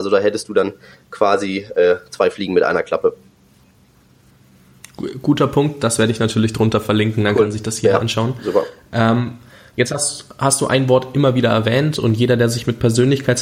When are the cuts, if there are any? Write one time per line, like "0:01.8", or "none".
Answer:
none

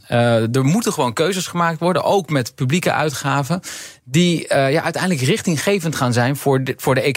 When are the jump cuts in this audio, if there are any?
none

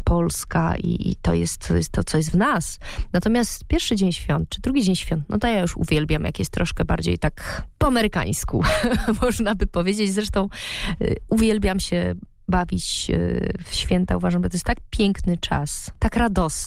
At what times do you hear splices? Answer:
none

